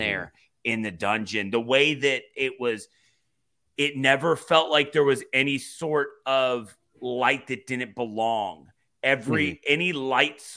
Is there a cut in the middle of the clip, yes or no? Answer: no